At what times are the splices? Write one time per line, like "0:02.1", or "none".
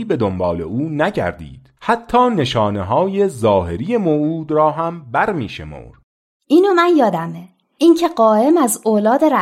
0:01.8